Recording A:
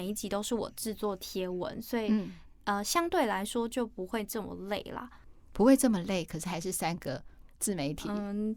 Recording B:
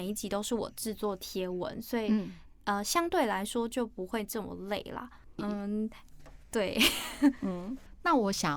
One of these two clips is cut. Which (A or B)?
B